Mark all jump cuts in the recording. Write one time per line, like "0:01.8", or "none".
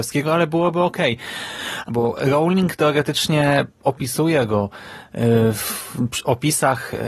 0:01.9